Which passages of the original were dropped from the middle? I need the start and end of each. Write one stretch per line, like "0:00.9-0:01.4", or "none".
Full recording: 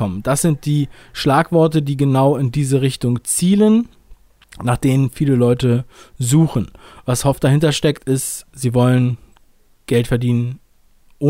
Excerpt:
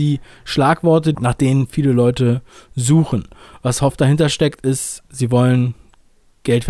0:01.8-0:04.6